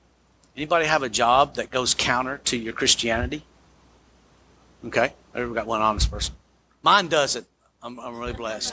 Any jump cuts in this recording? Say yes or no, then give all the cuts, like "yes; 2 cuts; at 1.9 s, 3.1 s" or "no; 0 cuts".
no; 0 cuts